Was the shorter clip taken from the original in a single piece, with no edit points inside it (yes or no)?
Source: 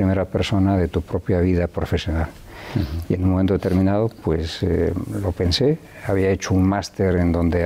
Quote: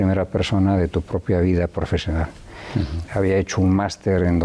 no